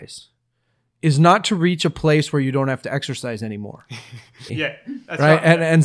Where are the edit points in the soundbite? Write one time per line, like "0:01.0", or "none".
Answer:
0:04.5